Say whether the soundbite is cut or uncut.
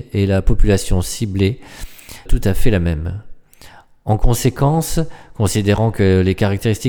cut